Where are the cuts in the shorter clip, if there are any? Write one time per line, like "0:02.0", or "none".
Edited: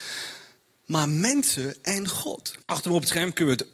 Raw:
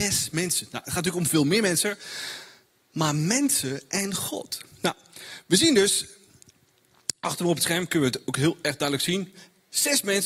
0:02.6